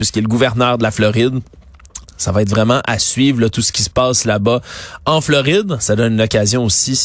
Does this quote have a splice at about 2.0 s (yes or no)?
yes